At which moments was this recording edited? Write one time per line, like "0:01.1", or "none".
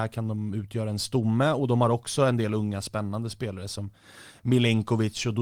none